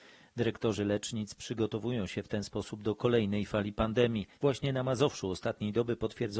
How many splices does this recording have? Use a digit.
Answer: 1